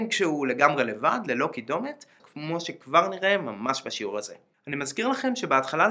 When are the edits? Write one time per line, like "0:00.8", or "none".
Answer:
0:02.2
0:04.5